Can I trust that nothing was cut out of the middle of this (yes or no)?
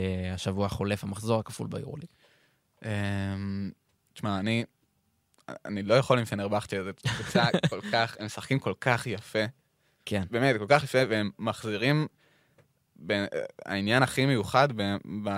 yes